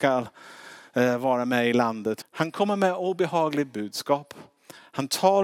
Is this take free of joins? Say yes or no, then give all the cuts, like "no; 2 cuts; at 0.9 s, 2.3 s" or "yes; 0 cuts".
no; 1 cut; at 2.2 s